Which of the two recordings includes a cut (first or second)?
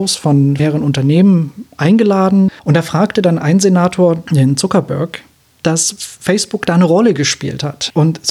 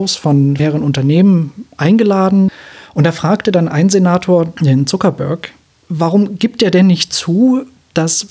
first